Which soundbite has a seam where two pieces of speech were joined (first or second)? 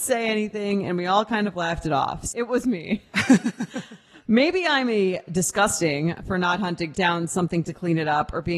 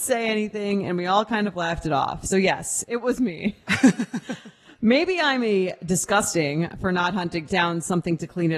first